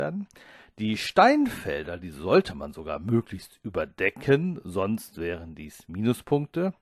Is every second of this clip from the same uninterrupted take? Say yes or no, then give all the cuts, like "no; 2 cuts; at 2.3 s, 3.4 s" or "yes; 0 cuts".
yes; 0 cuts